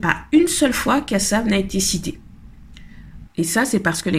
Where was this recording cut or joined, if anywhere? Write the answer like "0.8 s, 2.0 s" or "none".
3.3 s